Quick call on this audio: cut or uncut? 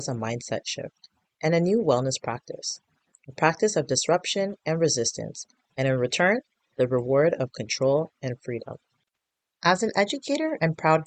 uncut